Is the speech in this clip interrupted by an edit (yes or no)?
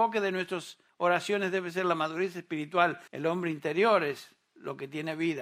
yes